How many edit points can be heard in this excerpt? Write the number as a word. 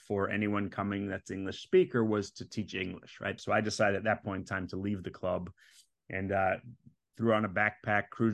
two